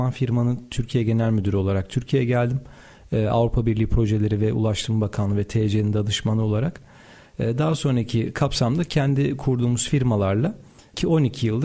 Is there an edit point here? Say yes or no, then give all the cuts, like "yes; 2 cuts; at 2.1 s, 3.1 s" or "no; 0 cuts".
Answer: no; 0 cuts